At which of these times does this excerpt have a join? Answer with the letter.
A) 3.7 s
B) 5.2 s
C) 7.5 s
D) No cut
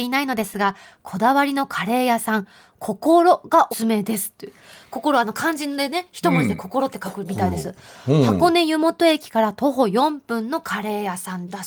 A